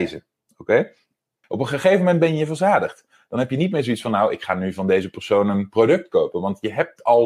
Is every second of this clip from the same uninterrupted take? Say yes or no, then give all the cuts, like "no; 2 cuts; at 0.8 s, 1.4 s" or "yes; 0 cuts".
no; 1 cut; at 1.4 s